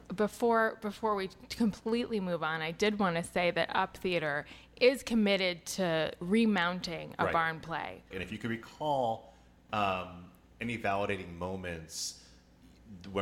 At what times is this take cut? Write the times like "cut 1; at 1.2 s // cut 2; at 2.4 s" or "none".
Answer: cut 1; at 8.1 s